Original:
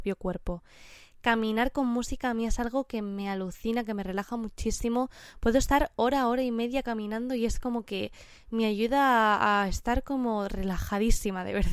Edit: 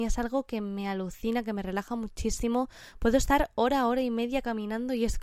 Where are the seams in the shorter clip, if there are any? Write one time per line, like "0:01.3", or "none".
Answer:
none